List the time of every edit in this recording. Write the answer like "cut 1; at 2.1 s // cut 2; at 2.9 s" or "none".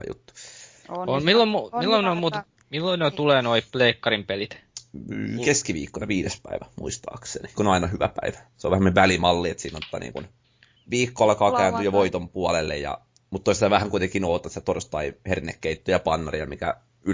cut 1; at 7.5 s